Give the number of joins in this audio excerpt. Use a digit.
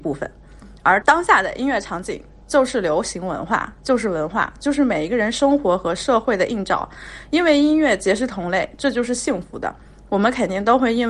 1